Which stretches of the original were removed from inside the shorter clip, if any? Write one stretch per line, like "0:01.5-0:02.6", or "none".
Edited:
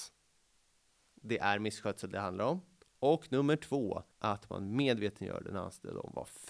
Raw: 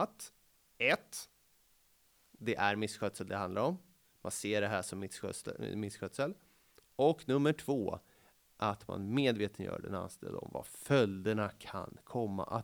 0:04.0-0:06.8
0:08.1-0:08.5